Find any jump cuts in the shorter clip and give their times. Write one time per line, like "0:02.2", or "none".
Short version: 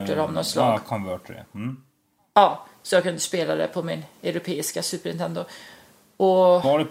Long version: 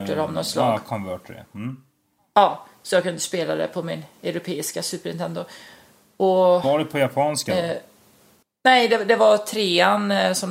none